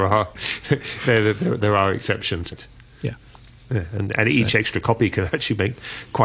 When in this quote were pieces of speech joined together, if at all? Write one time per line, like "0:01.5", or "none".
0:02.5